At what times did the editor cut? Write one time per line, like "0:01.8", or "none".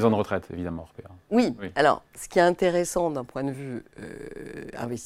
none